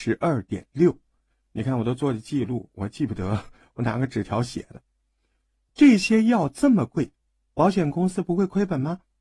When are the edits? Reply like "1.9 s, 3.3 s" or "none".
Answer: none